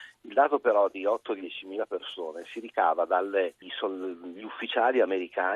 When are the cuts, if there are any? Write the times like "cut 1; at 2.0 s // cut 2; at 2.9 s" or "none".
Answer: cut 1; at 3.6 s